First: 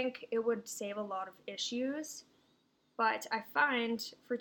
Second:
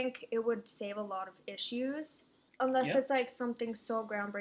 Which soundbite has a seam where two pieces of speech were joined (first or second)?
second